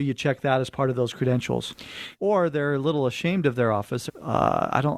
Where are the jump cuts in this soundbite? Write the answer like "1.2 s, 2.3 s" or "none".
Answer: 2.1 s, 4.1 s